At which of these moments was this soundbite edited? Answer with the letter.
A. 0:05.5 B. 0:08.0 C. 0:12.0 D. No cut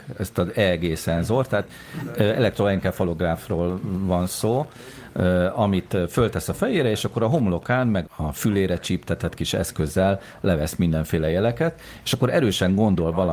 B